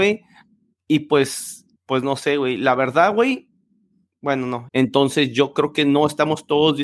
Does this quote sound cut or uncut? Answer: cut